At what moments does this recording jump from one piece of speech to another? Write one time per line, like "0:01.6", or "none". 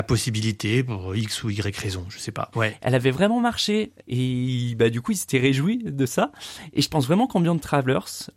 0:02.5
0:04.0